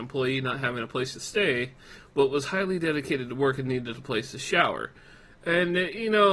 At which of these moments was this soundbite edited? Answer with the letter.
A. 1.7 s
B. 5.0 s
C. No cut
C